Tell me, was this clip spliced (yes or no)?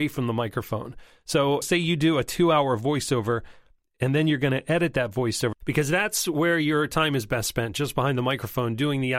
yes